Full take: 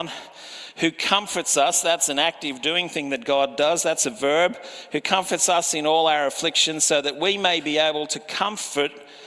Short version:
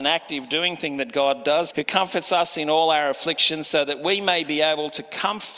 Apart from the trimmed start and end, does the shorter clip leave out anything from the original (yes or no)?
yes